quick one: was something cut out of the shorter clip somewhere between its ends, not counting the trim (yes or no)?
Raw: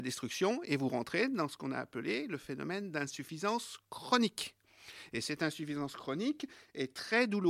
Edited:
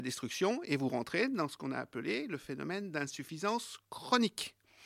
no